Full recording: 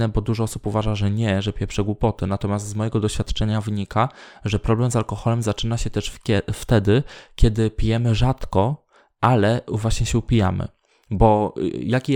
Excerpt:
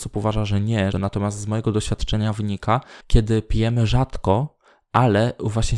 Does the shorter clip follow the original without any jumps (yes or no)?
no